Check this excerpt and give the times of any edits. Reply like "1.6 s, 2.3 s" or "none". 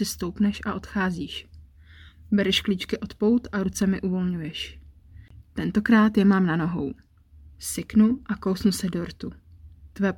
7.5 s